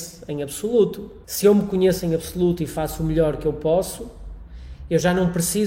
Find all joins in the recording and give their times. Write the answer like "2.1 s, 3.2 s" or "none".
1.2 s